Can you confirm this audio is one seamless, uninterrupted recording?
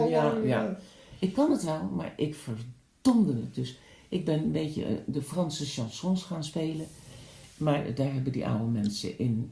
yes; 0 cuts

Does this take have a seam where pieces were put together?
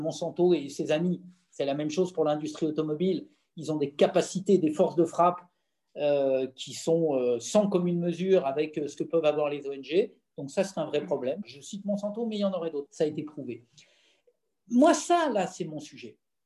yes; 2 cuts; at 11.4 s, 12.9 s

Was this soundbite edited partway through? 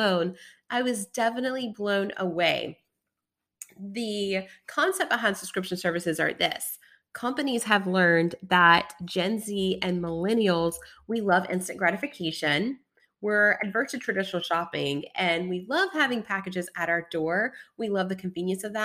no; 0 cuts

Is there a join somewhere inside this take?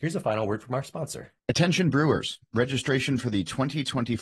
yes; 1 cut; at 1.4 s

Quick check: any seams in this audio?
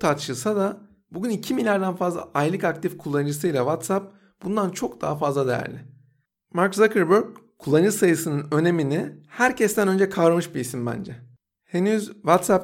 no; 0 cuts

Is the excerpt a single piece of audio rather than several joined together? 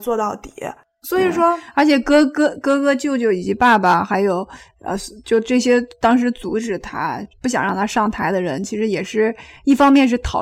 yes; 0 cuts

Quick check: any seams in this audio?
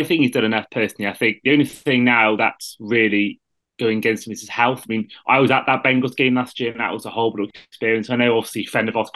no; 0 cuts

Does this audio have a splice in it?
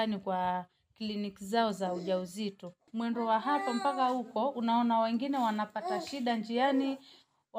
no; 0 cuts

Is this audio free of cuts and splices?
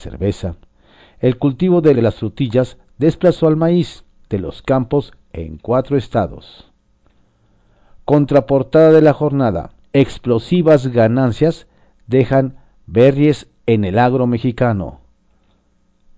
no; 2 cuts; at 1.9 s, 9.8 s

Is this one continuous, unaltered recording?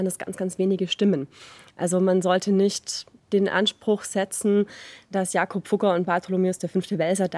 yes; 0 cuts

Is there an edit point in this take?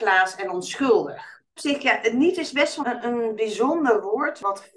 yes; 1 cut; at 2.8 s

